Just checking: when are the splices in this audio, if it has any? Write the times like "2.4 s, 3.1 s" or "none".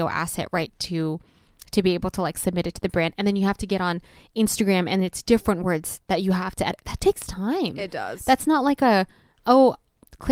none